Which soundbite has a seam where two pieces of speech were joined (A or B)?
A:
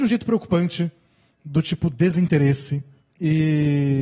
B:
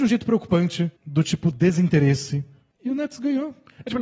B